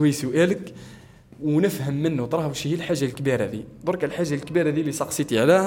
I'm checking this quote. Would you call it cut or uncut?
uncut